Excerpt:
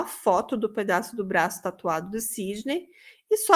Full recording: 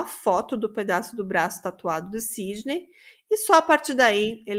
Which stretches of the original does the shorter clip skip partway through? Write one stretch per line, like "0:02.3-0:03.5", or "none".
none